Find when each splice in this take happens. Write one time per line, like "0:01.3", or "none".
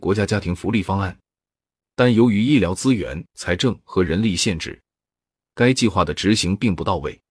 0:01.8